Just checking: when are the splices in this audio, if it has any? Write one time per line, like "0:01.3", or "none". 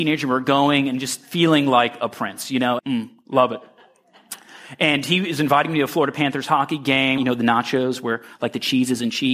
0:02.8
0:07.2

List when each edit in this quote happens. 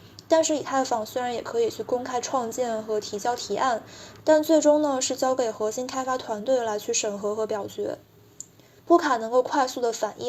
0:08.8

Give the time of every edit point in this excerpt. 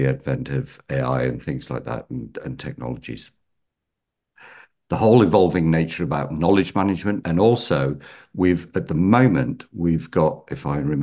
0:07.2

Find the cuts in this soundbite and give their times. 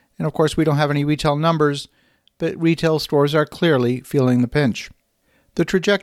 none

